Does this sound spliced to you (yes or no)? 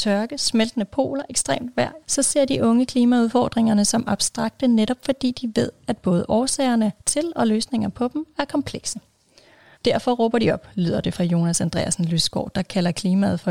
yes